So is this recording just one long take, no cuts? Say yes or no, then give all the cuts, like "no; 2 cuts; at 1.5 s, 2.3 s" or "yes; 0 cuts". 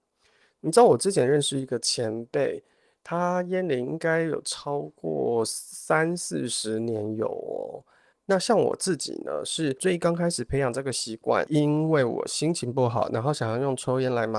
no; 1 cut; at 8.1 s